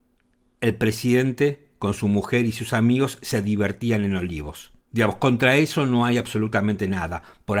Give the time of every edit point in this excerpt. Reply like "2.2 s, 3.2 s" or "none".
4.8 s